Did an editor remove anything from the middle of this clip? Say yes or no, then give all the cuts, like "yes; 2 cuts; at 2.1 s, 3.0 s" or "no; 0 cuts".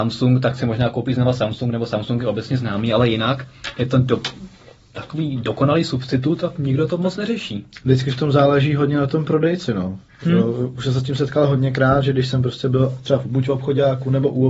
no; 0 cuts